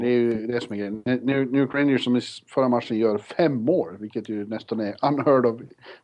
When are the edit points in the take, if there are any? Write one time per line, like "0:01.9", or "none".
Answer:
none